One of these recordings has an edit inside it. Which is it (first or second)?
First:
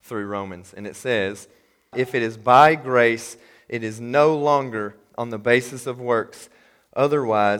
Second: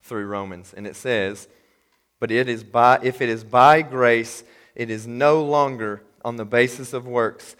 first